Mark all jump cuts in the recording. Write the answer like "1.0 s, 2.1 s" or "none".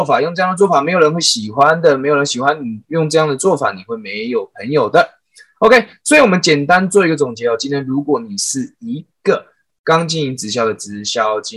none